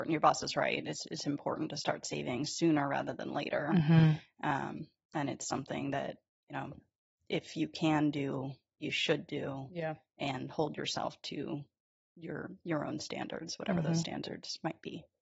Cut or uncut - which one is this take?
uncut